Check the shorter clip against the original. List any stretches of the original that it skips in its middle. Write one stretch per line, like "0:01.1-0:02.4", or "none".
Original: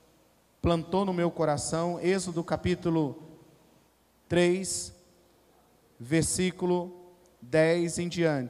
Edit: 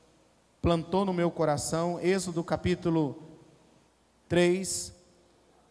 none